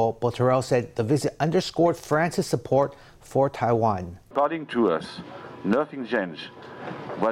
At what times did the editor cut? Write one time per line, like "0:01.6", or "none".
0:04.3